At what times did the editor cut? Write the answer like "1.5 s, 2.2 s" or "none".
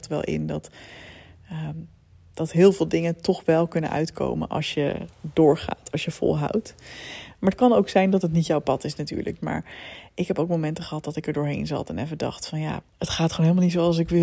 9.4 s, 12.8 s